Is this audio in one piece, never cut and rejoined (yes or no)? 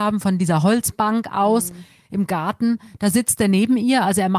yes